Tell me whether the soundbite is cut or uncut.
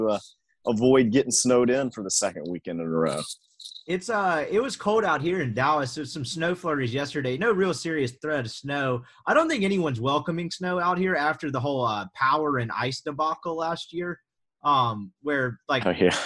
uncut